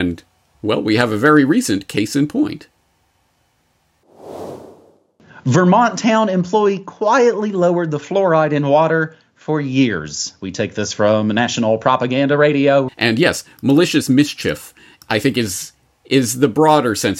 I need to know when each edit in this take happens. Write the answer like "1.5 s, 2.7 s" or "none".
12.9 s